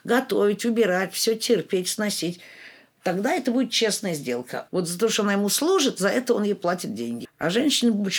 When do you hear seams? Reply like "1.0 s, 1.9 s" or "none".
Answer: 4.7 s, 7.2 s